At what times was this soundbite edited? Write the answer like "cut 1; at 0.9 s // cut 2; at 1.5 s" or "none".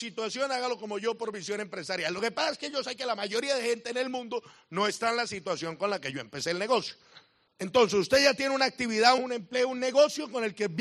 cut 1; at 7.5 s // cut 2; at 9.2 s